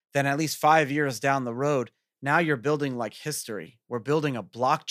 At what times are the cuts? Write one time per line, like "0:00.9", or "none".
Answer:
none